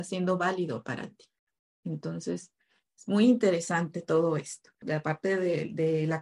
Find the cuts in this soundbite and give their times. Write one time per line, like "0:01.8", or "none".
0:04.8

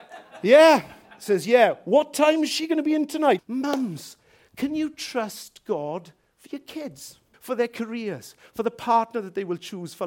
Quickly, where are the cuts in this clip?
0:03.4
0:07.3

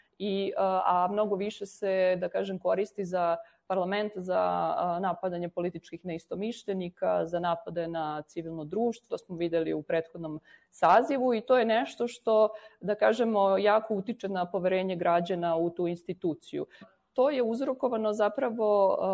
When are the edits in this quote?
0:09.1
0:16.8

